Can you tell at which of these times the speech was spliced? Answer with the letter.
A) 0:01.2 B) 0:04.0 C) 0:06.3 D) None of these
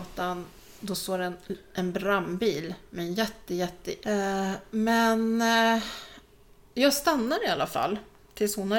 B